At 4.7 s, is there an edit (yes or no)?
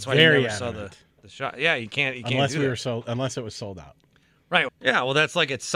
yes